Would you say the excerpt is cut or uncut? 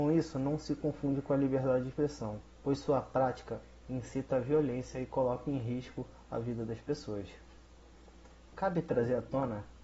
cut